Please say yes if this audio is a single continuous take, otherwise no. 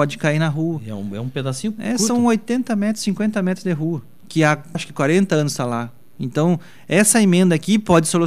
no